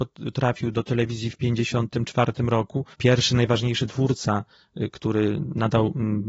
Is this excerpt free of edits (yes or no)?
no